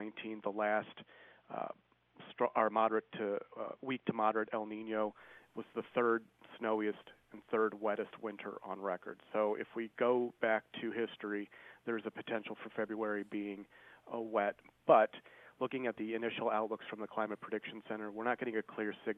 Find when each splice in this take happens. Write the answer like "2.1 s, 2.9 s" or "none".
none